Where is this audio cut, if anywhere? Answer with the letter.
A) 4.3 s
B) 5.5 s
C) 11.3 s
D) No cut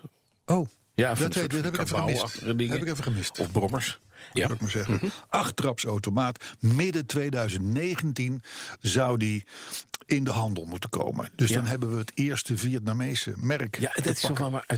A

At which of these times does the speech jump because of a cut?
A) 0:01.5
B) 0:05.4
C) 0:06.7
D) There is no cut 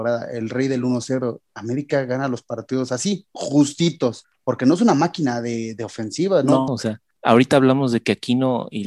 C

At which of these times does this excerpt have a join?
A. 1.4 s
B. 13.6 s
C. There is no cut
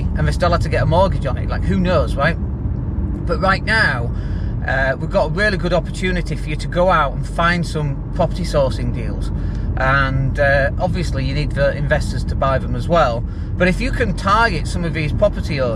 B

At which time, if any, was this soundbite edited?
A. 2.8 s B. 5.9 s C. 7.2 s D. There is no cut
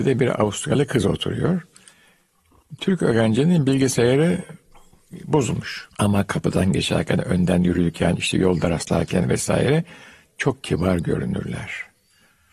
B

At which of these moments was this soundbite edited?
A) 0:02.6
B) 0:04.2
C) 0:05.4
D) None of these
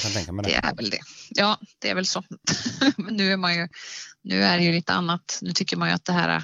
D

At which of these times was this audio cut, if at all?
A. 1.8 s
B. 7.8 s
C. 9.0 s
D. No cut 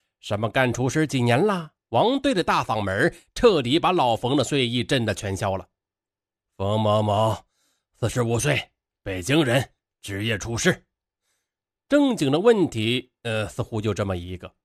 A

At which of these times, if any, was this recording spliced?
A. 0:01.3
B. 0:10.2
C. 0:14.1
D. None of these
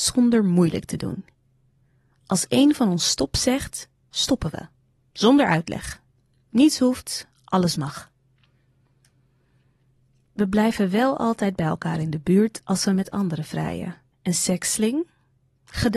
C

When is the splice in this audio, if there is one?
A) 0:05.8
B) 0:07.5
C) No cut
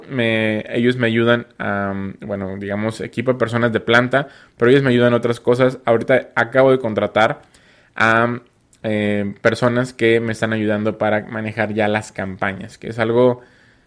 C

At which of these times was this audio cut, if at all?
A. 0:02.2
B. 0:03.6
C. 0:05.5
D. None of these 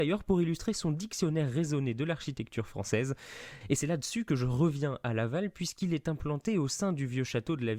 B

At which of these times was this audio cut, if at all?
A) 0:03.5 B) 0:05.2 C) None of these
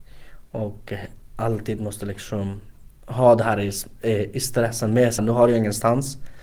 B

